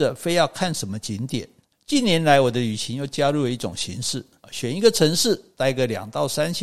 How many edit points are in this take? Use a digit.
2